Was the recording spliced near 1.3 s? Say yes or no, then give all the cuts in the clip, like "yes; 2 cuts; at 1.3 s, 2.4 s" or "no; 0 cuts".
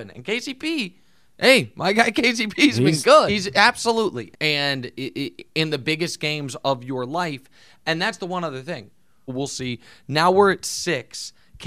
no; 3 cuts; at 3.3 s, 4.3 s, 9.3 s